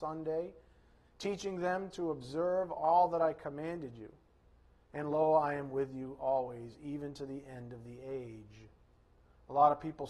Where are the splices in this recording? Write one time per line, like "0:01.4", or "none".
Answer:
none